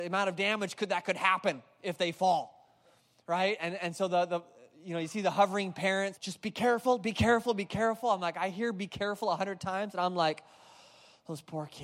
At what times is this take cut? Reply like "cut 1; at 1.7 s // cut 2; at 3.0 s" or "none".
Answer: cut 1; at 6.2 s